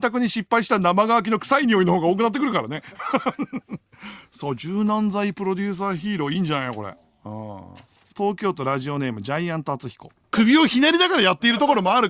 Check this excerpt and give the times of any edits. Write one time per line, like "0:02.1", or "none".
0:08.1
0:10.3